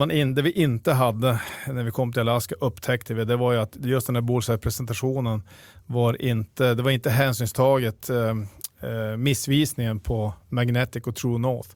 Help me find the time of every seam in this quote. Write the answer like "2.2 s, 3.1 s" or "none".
none